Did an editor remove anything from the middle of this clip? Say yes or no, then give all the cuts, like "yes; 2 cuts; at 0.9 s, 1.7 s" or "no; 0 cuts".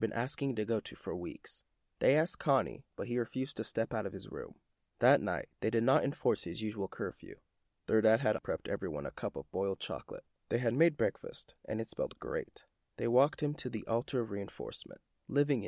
yes; 3 cuts; at 8.4 s, 10.4 s, 12.9 s